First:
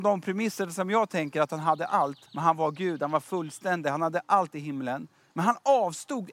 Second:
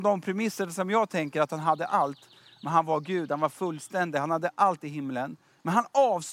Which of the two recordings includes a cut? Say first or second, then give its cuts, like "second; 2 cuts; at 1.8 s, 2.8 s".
first; 1 cut; at 2.3 s